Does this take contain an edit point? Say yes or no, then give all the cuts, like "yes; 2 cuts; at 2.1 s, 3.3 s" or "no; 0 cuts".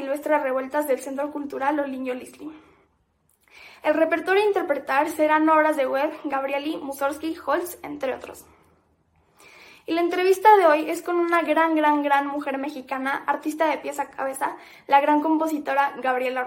no; 0 cuts